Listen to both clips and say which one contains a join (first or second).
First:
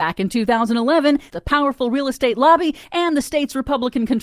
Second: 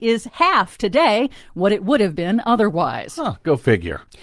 first